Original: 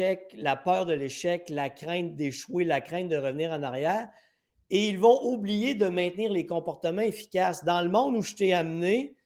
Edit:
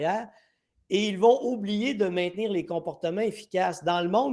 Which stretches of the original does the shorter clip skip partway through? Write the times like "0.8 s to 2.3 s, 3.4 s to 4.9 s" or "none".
none

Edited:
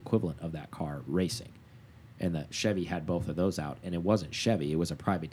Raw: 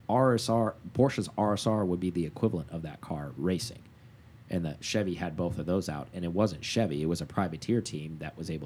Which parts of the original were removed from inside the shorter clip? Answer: none

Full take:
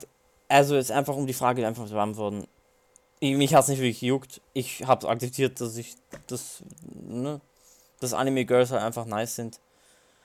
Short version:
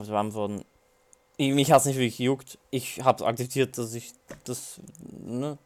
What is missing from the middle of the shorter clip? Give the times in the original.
none

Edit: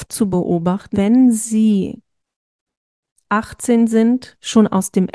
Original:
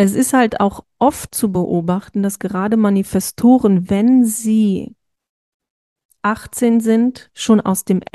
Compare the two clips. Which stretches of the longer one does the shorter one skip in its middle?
2.2 s to 3.9 s

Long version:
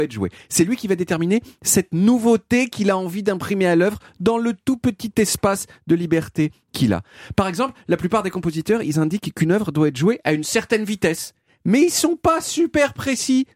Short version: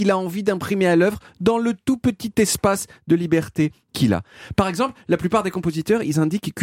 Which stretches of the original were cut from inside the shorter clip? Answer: none

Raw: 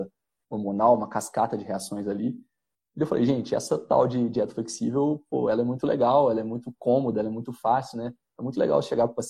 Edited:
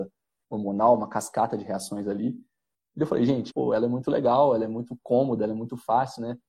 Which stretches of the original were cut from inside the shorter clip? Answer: 3.5 s to 5.3 s

